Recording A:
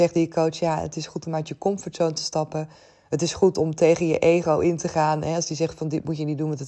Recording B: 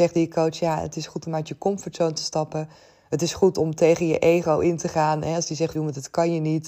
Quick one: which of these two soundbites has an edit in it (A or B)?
B